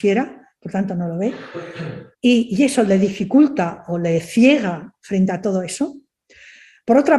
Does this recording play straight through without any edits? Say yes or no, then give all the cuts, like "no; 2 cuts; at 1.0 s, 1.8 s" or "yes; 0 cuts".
no; 1 cut; at 2.1 s